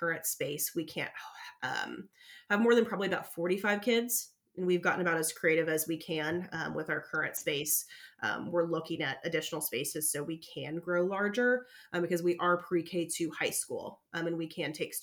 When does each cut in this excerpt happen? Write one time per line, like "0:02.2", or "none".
none